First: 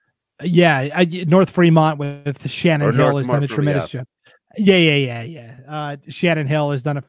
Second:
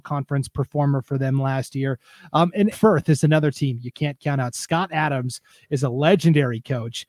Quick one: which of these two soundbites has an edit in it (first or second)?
second